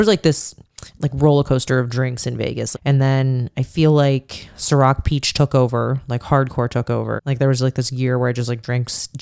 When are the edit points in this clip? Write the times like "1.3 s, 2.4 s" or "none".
2.7 s, 7.2 s

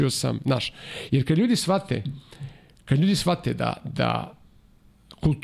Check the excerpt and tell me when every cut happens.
none

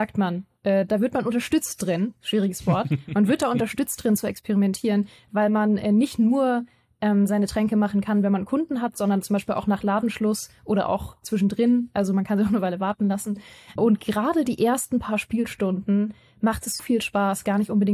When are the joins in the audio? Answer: 13.8 s, 16.8 s

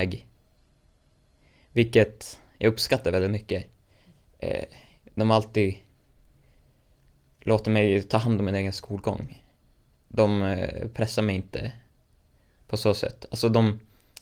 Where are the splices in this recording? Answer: none

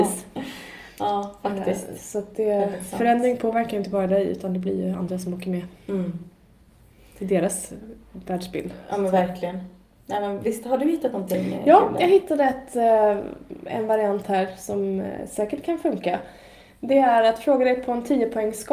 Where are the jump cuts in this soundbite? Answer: none

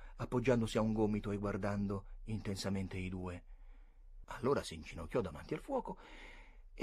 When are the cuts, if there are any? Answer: 4.2 s

